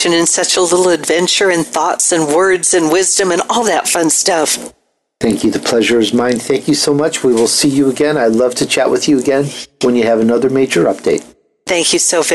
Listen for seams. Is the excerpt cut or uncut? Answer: uncut